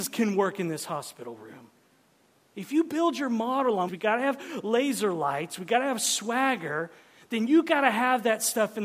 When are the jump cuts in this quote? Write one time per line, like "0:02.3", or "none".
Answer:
0:02.5
0:03.9